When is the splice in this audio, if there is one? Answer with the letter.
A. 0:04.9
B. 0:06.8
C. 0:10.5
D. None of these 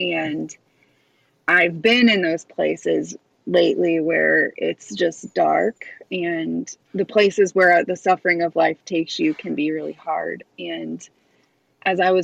B